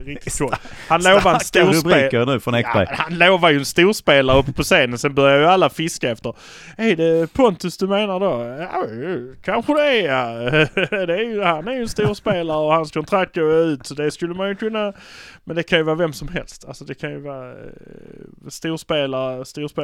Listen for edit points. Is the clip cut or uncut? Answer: uncut